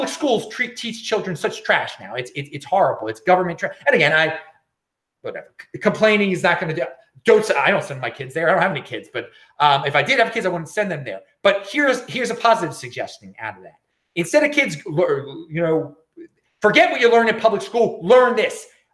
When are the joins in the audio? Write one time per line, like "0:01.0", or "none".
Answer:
none